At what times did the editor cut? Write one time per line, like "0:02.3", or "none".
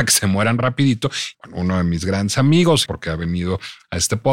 0:01.3
0:02.9